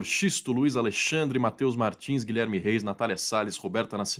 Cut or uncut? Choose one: uncut